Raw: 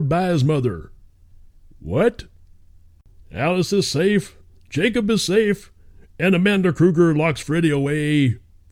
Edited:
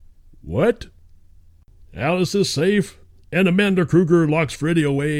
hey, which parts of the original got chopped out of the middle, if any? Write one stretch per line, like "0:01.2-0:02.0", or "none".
0:04.6-0:06.1